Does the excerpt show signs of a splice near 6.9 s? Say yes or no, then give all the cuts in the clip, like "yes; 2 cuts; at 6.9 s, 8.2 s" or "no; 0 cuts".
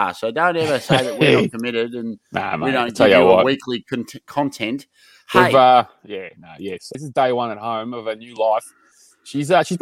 yes; 1 cut; at 6.9 s